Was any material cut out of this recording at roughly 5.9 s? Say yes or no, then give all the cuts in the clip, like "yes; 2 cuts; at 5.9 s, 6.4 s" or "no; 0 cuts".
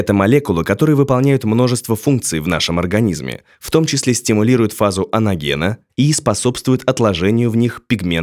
yes; 1 cut; at 5.9 s